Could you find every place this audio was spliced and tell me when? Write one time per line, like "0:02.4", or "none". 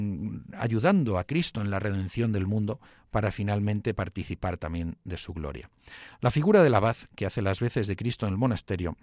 none